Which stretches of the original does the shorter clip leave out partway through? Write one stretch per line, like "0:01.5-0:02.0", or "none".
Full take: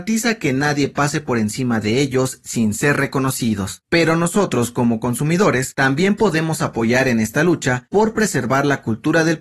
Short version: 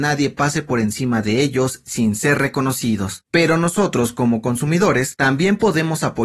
none